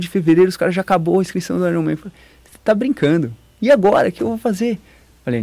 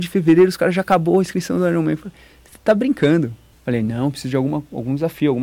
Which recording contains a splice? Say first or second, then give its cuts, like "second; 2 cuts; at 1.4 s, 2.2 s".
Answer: second; 1 cut; at 3.5 s